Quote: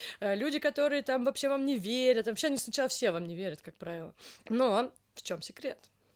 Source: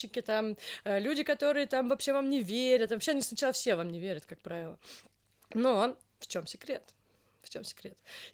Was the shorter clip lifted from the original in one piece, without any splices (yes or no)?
no